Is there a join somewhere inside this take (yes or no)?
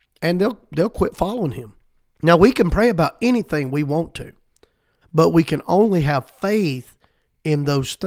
yes